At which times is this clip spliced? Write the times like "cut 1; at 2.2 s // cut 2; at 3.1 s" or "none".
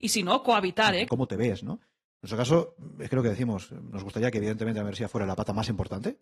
cut 1; at 1.1 s